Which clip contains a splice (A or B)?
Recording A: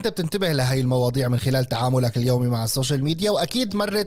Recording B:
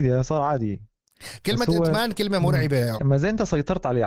B